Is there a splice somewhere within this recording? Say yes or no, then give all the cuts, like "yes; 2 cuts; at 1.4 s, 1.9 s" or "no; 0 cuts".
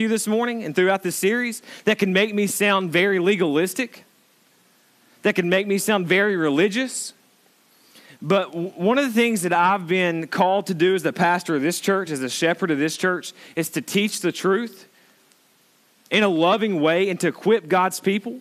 no; 0 cuts